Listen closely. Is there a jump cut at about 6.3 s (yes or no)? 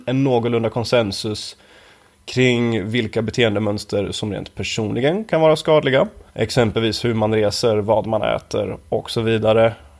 yes